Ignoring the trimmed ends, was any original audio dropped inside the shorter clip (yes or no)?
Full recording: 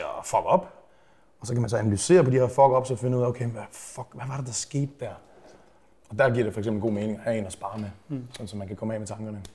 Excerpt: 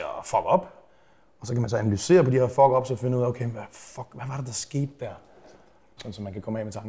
yes